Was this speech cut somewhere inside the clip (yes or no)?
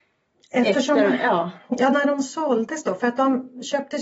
no